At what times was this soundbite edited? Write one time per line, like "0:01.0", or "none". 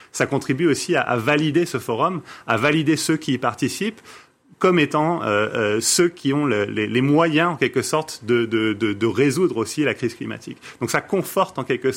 none